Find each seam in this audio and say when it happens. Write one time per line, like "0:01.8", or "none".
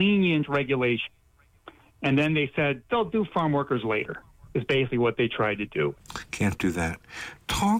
0:05.9